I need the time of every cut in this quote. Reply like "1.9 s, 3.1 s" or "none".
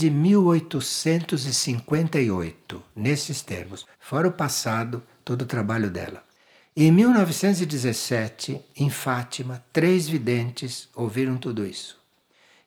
3.9 s, 6.6 s

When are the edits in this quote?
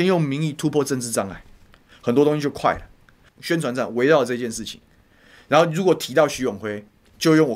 3.3 s

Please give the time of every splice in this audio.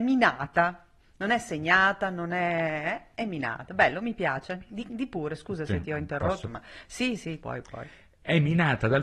none

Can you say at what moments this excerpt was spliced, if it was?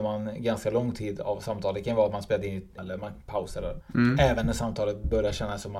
2.8 s, 3.8 s

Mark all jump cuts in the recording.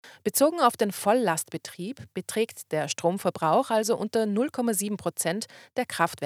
none

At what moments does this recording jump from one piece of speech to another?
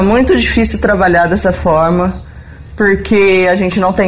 none

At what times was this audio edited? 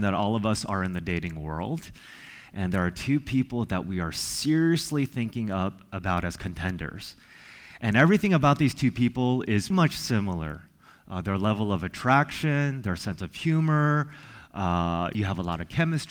9.7 s, 15.1 s

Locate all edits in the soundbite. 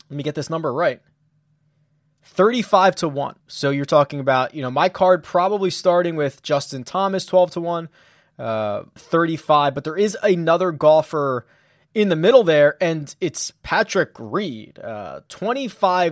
3.4 s, 9.0 s

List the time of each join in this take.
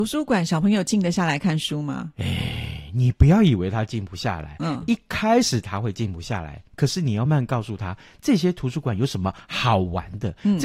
7.3 s

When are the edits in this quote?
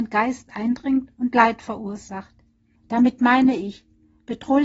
2.8 s

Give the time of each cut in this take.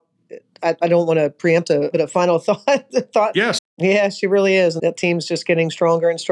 1.9 s, 3.6 s, 4.8 s

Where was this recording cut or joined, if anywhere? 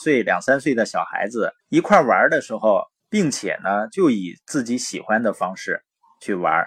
1.6 s, 3.0 s

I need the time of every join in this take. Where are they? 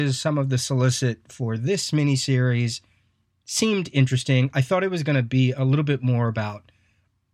none

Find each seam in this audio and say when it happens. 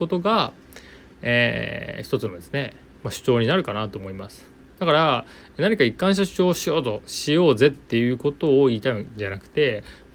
none

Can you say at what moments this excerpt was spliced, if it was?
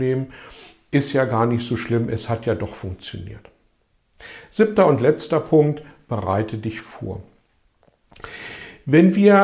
none

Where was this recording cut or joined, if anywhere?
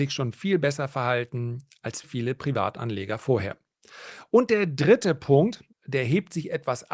2.0 s, 5.7 s

